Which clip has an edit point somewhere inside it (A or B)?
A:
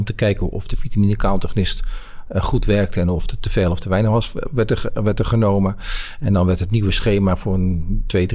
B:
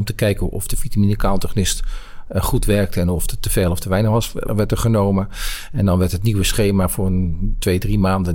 B